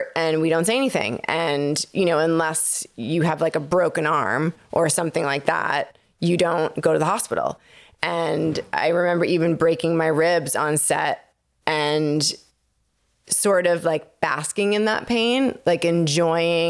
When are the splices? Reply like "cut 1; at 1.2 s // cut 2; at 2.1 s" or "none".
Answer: none